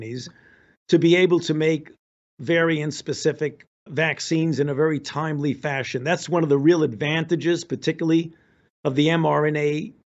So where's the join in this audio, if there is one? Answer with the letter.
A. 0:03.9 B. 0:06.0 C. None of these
A